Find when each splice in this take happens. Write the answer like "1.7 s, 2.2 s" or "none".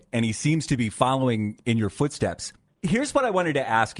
none